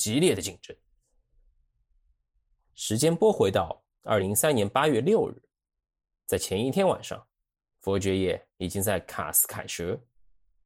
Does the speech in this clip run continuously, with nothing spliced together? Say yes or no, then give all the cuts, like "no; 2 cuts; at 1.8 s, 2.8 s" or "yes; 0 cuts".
no; 1 cut; at 4.2 s